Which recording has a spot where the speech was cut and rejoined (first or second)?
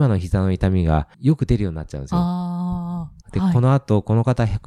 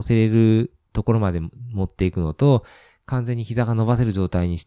first